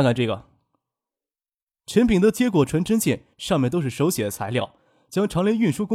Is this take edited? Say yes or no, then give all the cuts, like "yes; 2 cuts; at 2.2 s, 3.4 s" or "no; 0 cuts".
no; 0 cuts